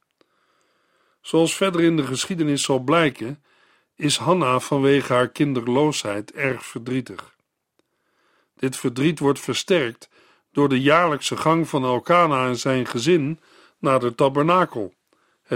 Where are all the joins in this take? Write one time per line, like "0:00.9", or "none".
none